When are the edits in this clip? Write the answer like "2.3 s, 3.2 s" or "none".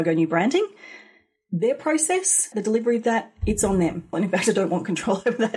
2.5 s, 4.1 s